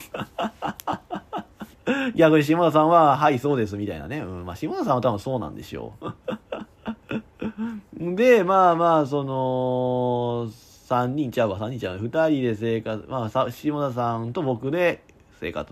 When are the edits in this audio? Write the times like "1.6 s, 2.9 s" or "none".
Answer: none